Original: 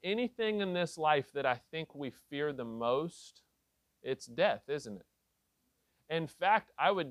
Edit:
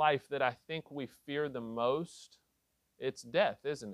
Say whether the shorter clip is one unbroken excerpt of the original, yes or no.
yes